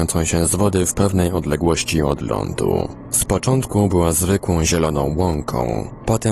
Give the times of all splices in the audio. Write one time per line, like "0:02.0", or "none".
none